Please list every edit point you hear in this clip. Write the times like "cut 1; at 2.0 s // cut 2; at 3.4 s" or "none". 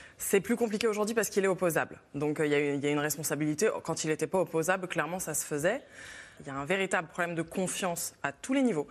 cut 1; at 6.4 s